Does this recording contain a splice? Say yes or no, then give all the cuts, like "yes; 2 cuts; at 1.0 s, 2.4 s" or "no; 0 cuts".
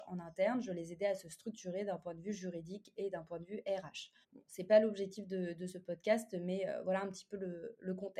yes; 1 cut; at 4.2 s